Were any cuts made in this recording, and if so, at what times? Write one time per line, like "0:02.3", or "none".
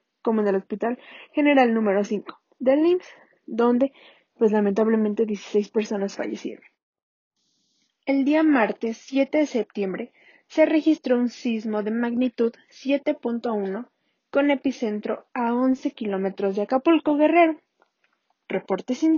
none

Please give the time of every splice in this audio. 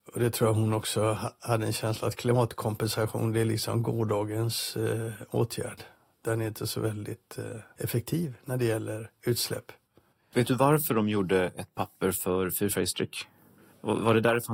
none

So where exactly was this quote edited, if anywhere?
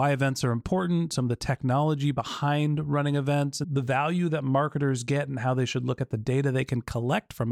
0:03.6

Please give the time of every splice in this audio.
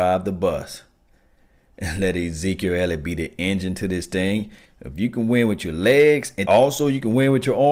0:04.6
0:06.4

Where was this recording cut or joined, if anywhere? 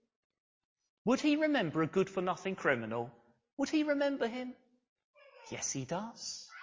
0:03.5

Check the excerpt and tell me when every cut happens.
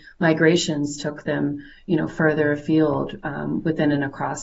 none

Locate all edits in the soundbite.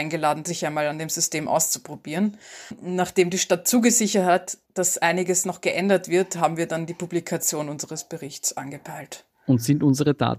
0:04.6

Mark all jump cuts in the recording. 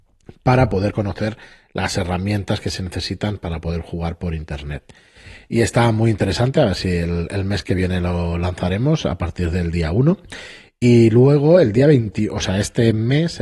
none

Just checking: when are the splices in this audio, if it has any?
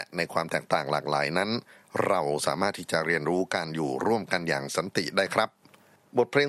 none

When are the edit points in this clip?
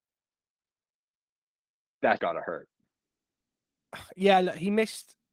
0:02.2

